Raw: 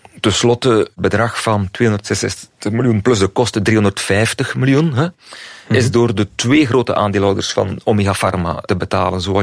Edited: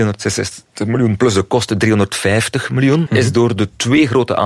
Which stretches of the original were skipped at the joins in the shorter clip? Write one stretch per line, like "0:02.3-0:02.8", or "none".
0:04.9-0:05.6